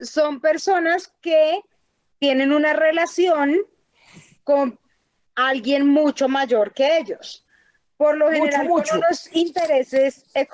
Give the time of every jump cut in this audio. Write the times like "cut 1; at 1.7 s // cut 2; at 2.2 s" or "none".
none